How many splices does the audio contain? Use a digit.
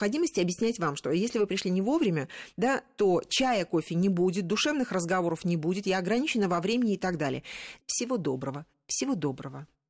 1